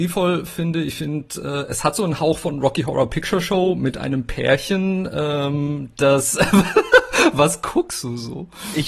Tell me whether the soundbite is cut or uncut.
uncut